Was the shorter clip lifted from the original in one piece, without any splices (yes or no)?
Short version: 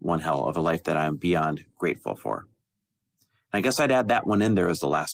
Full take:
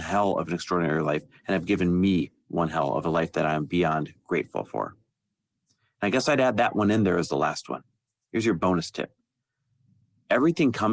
yes